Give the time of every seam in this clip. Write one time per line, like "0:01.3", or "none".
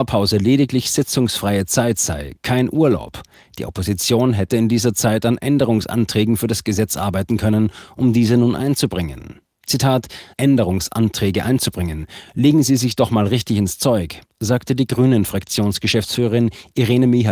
0:10.3